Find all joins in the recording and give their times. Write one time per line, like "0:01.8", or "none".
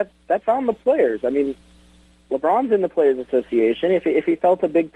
none